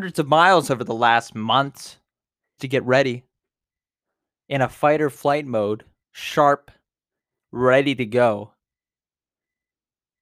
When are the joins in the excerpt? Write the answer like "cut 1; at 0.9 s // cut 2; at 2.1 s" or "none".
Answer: cut 1; at 2.6 s // cut 2; at 6.0 s